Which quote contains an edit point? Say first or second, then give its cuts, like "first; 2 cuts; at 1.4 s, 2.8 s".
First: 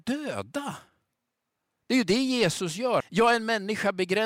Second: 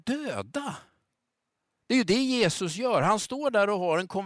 first; 1 cut; at 3.0 s